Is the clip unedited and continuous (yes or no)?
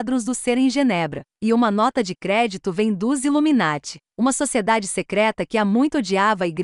yes